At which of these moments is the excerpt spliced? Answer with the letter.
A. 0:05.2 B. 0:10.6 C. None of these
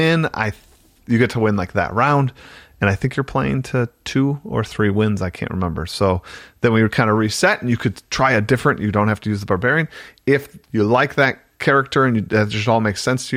B